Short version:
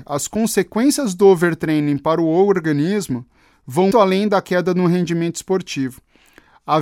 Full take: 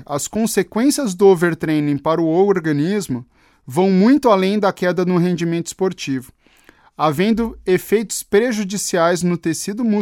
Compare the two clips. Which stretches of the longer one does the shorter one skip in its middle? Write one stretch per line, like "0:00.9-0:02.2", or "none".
0:03.9-0:04.2